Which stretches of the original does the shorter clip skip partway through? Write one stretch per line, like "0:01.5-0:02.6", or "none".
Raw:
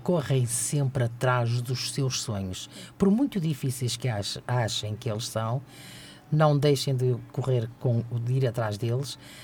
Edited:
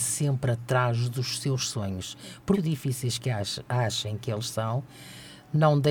0:03.1-0:03.3